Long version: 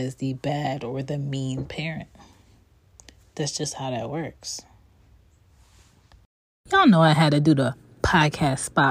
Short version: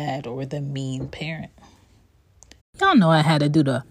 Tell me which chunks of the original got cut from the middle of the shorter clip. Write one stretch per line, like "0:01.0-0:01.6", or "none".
0:03.2-0:06.5